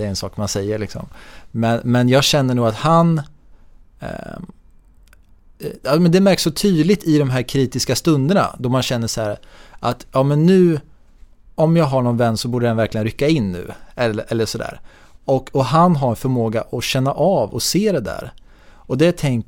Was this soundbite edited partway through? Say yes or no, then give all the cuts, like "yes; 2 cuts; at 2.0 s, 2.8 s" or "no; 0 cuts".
no; 0 cuts